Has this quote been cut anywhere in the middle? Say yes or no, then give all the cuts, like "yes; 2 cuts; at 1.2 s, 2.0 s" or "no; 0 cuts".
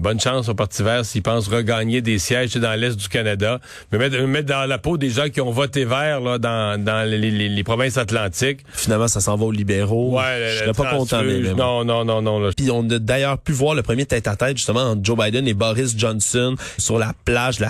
yes; 2 cuts; at 12.5 s, 16.8 s